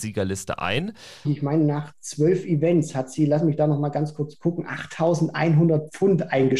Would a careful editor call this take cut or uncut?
cut